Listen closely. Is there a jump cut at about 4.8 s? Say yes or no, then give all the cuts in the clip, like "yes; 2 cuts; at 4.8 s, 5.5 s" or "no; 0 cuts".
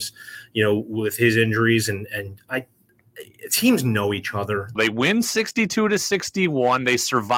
yes; 1 cut; at 4.8 s